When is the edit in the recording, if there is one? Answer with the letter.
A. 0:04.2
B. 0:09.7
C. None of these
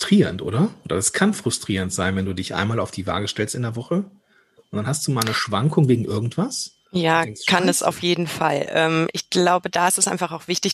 C